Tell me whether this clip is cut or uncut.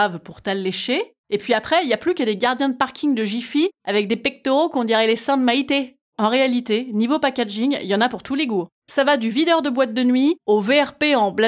cut